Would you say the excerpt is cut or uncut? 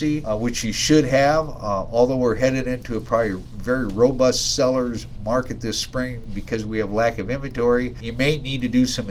uncut